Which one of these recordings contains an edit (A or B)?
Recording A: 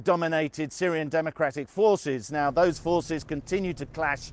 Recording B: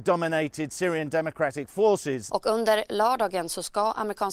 B